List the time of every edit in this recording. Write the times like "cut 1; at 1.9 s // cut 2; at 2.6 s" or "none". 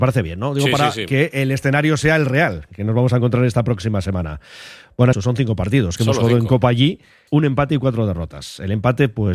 cut 1; at 5.1 s // cut 2; at 7.3 s